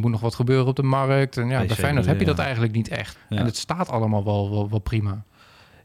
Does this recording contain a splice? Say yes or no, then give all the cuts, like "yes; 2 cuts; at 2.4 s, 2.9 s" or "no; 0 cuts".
yes; 1 cut; at 3.1 s